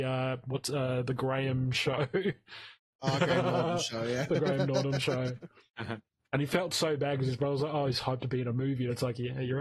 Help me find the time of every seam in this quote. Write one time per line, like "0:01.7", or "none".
none